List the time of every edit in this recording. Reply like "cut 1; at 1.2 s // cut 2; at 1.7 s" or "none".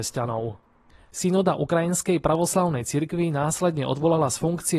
cut 1; at 1.1 s